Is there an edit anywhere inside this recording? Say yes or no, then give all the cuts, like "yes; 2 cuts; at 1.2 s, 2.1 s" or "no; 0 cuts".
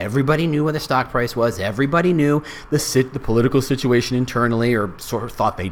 no; 0 cuts